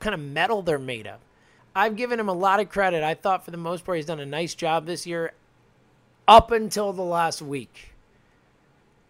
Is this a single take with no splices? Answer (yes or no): no